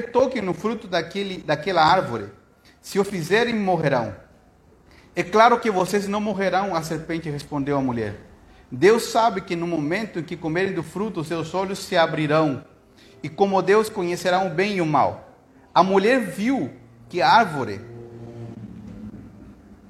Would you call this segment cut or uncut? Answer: uncut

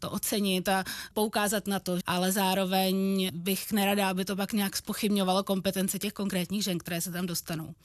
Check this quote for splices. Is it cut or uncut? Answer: cut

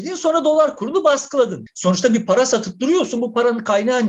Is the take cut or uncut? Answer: cut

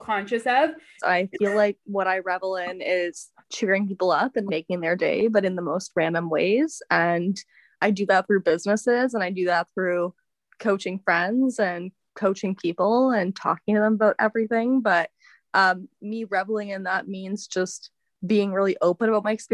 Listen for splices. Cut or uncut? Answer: cut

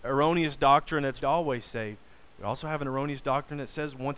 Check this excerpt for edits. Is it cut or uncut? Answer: cut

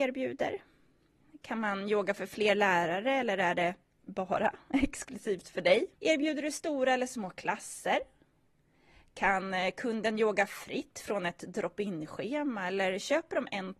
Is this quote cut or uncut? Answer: cut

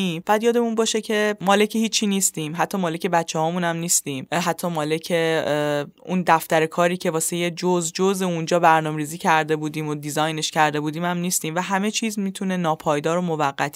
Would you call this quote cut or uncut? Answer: uncut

